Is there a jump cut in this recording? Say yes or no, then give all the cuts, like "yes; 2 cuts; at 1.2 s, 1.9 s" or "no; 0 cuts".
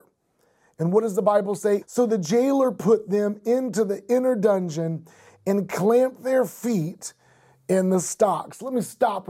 yes; 1 cut; at 1.8 s